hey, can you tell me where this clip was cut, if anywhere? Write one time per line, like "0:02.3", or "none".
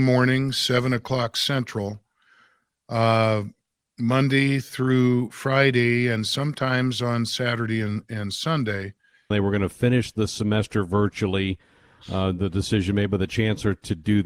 0:09.3